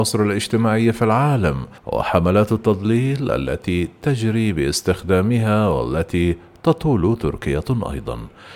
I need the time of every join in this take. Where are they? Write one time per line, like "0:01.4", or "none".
0:01.8